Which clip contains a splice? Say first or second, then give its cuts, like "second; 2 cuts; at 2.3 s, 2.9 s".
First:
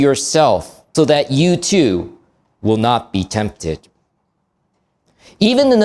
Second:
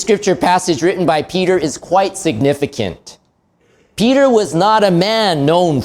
first; 1 cut; at 0.9 s